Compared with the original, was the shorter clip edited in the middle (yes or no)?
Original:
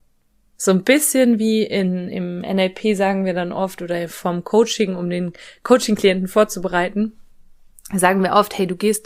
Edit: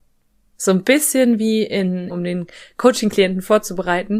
yes